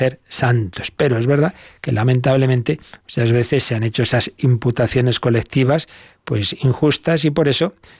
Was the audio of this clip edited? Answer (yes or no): no